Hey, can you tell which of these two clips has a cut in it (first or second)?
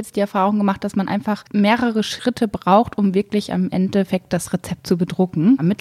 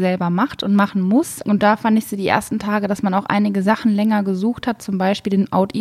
second